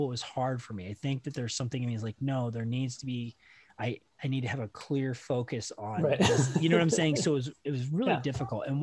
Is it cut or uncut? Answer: uncut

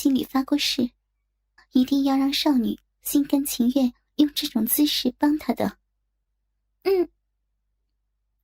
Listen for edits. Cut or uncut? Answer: cut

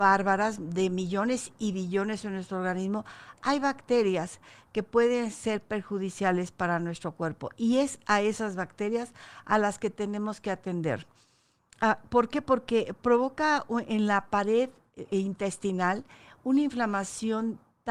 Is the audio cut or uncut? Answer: uncut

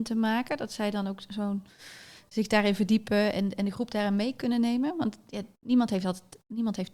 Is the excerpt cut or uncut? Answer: uncut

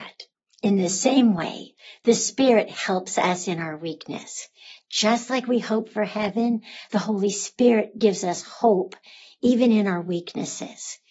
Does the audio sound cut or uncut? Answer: uncut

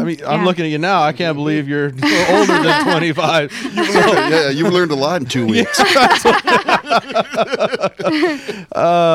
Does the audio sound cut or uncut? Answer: uncut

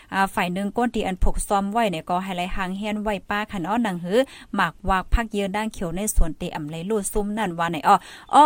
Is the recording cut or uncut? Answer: uncut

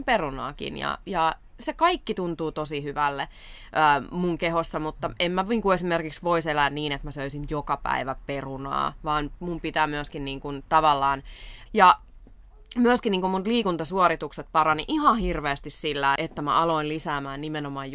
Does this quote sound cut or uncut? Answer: cut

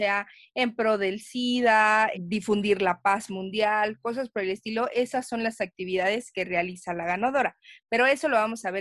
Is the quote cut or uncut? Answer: cut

